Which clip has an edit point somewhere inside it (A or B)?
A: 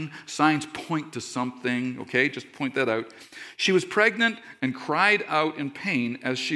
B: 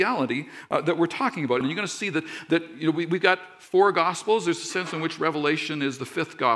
B